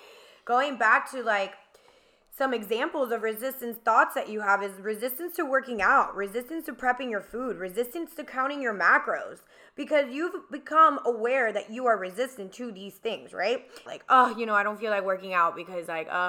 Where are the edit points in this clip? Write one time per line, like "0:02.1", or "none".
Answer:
0:13.9